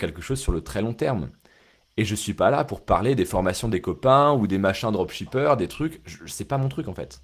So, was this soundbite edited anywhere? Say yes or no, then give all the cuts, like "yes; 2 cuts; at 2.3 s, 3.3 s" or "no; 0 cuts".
no; 0 cuts